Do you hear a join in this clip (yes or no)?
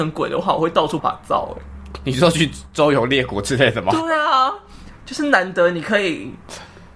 yes